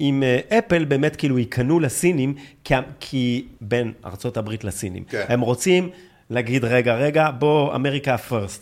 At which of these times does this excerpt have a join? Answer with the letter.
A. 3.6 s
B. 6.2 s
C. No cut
A